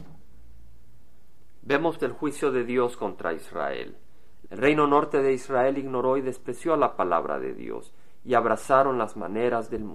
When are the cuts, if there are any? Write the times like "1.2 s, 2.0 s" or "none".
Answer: 2.0 s, 4.4 s